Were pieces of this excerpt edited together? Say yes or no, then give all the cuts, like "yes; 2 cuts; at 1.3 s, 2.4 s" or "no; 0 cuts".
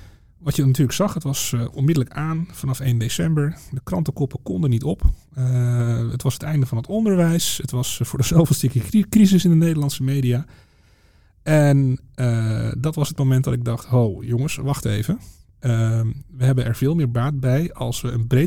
no; 0 cuts